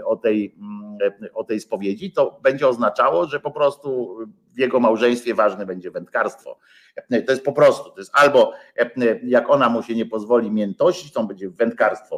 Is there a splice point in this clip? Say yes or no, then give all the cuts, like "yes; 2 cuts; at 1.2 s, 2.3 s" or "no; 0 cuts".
no; 0 cuts